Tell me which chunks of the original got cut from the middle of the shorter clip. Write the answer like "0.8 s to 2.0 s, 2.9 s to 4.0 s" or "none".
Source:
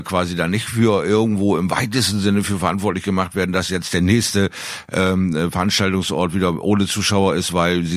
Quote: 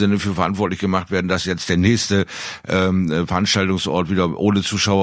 none